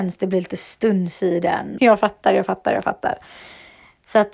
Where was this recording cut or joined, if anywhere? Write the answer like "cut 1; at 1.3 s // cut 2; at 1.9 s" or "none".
cut 1; at 1.8 s